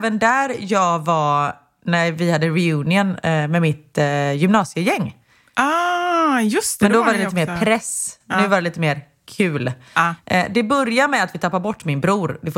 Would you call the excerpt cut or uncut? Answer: uncut